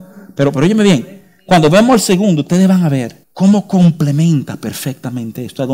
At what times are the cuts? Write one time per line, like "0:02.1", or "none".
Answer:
0:03.2